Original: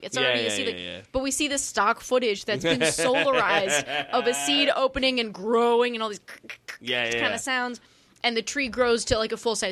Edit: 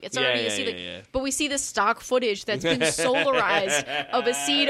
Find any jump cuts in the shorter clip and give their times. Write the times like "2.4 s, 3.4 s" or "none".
none